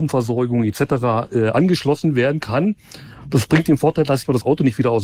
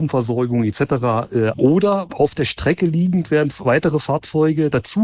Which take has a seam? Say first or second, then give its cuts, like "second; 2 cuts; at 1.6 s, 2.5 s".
second; 1 cut; at 1.5 s